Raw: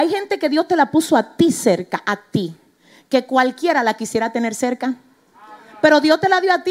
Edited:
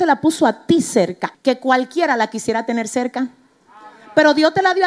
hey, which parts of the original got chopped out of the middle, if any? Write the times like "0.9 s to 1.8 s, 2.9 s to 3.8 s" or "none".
2.0 s to 3.0 s